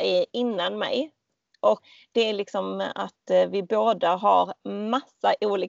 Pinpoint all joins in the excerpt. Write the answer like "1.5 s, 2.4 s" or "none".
none